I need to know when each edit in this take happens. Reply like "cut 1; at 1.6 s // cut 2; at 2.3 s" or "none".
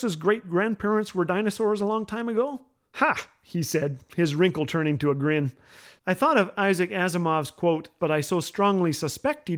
cut 1; at 8.0 s